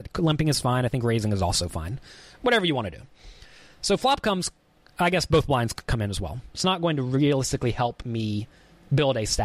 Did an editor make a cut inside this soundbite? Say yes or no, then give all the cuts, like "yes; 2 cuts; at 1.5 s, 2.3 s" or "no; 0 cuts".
yes; 1 cut; at 6.5 s